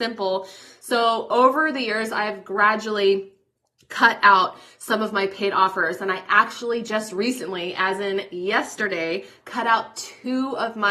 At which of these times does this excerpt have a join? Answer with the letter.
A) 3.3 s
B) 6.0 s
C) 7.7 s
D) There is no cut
D